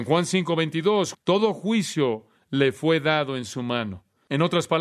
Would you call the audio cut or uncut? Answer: cut